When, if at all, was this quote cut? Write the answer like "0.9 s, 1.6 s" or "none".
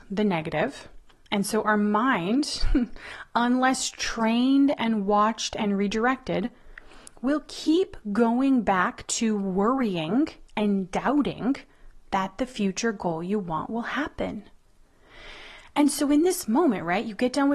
none

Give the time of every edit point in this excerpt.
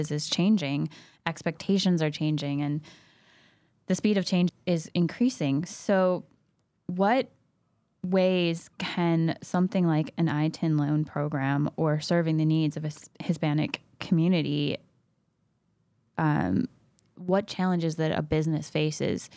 none

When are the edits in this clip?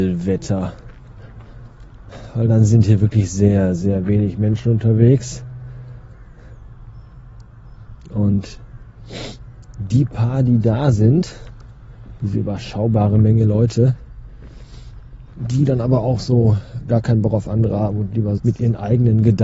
15.3 s, 18.4 s

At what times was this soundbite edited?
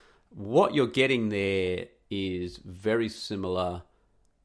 none

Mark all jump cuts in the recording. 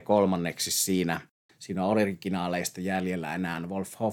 1.5 s

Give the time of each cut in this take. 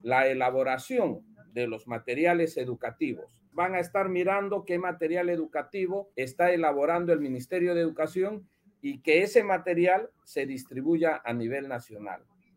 3.5 s, 6.1 s

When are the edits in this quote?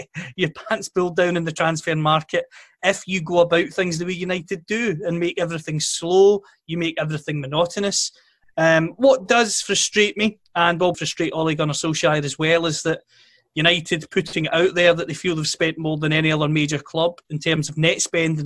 8.4 s, 10.9 s

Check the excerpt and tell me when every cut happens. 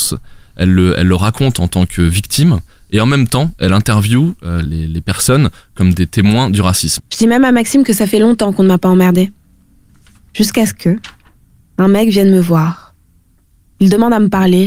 4.6 s, 7.0 s

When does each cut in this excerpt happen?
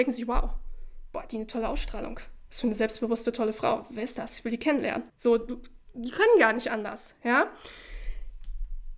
5.1 s

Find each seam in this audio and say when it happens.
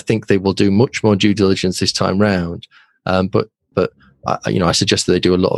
3.7 s

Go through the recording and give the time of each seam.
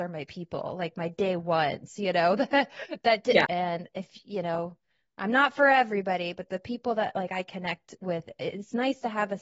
3.5 s

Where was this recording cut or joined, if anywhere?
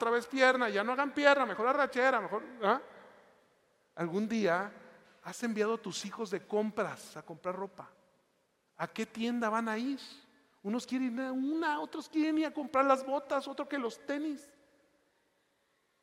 none

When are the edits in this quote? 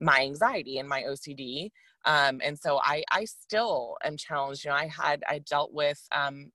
none

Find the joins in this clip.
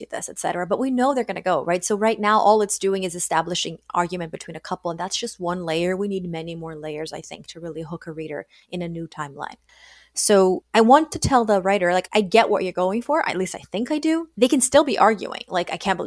12.1 s, 14.3 s

